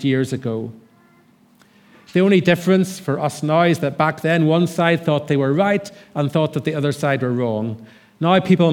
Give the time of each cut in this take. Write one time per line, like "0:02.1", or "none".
none